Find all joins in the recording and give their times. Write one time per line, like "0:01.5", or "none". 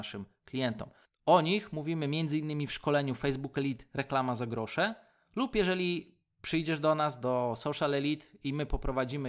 0:01.0